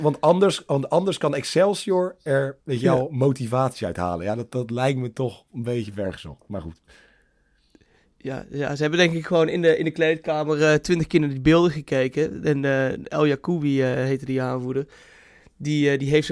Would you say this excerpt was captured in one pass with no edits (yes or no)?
yes